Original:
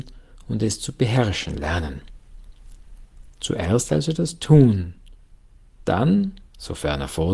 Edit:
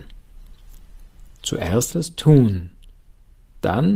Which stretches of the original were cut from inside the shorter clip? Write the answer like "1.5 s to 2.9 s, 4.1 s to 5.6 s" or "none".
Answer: 3.9 s to 4.1 s